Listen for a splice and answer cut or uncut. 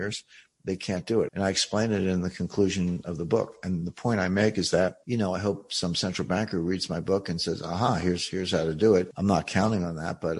cut